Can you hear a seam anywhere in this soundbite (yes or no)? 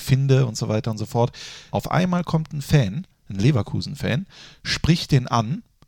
yes